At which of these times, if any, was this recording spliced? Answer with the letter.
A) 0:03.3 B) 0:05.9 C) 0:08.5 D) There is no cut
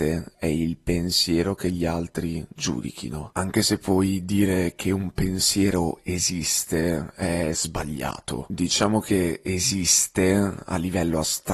D